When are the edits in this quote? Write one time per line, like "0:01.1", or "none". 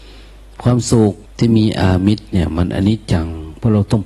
0:01.2